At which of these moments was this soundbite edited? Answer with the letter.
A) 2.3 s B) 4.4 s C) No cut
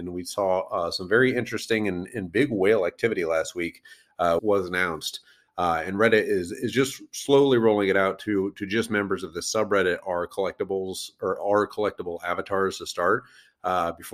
B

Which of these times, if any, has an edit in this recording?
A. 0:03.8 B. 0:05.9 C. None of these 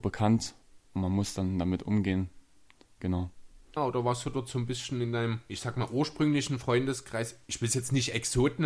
A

